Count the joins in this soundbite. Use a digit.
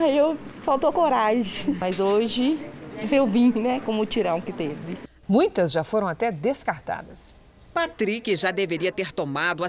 1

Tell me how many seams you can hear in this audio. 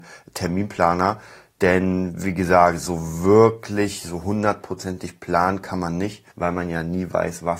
1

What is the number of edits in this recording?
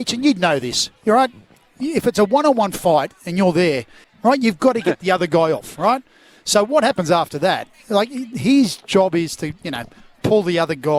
1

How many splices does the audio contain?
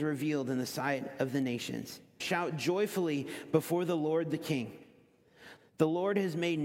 2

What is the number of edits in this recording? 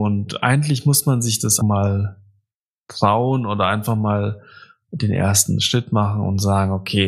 1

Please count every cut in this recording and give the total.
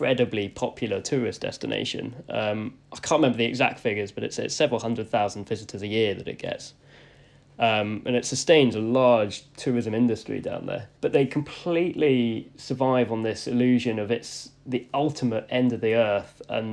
1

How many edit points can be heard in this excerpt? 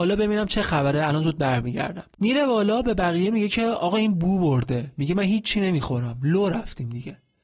1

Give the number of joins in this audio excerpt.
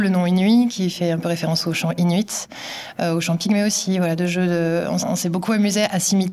1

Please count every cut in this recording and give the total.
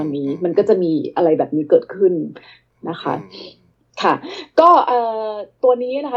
0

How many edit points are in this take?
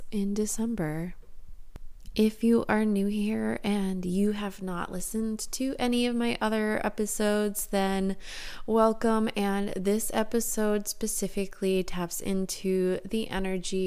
0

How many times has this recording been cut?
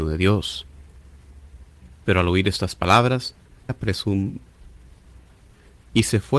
2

